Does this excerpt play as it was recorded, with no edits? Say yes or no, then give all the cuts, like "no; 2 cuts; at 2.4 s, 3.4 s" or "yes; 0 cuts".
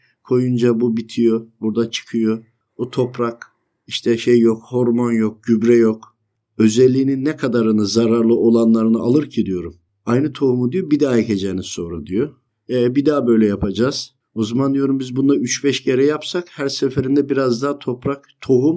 yes; 0 cuts